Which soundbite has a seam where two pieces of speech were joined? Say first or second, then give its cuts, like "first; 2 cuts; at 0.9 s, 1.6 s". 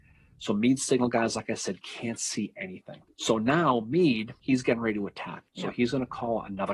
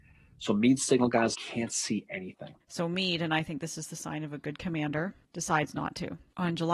second; 2 cuts; at 1.3 s, 2.6 s